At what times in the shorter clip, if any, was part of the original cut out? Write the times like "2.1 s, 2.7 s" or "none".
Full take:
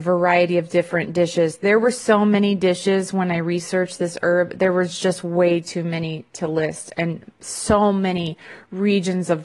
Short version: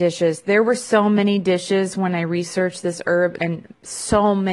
3.4 s